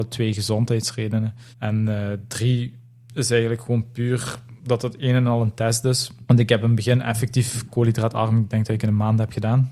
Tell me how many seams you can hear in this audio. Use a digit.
2